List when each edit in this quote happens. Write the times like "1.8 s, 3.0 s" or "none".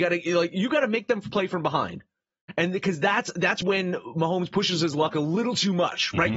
3.6 s